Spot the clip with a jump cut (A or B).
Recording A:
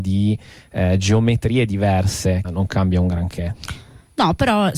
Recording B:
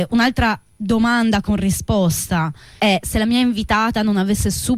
A